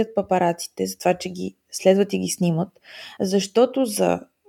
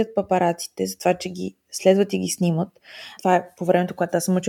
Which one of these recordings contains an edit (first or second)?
second